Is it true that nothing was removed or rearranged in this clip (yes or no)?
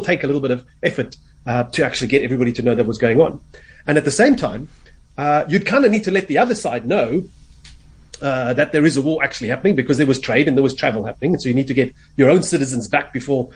yes